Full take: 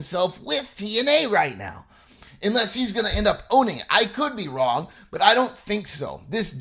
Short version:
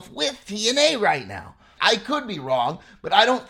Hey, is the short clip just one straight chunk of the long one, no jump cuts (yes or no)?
no